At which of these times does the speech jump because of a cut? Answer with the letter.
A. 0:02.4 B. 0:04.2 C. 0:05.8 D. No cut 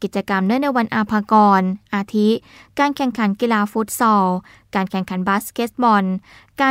D